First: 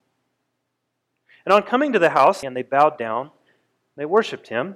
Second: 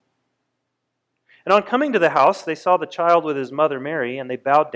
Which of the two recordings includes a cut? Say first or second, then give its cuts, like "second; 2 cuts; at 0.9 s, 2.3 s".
first; 1 cut; at 2.4 s